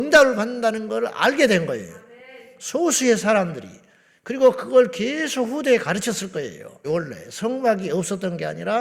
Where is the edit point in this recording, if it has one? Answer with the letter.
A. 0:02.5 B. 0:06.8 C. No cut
B